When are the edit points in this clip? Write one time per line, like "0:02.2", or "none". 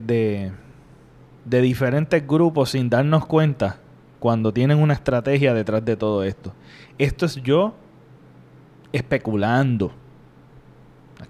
none